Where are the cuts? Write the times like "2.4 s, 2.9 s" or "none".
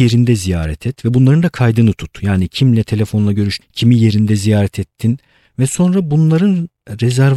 3.6 s